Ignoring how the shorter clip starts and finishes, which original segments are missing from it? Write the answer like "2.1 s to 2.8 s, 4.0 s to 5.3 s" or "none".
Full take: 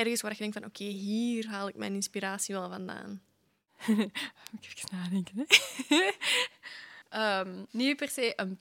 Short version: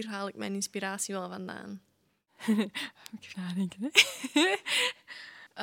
4.7 s to 4.9 s